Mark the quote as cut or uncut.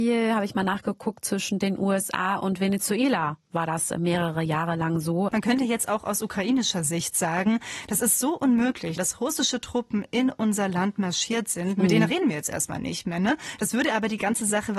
cut